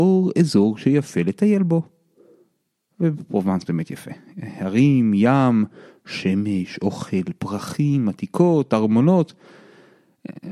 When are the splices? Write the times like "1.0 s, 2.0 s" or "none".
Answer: none